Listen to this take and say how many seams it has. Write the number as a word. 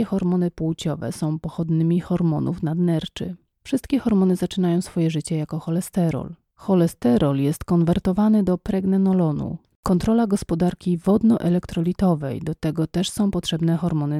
one